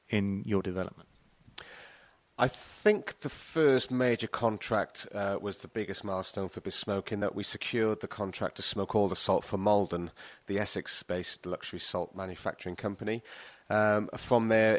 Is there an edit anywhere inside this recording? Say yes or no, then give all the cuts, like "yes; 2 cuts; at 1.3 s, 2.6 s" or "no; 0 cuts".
no; 0 cuts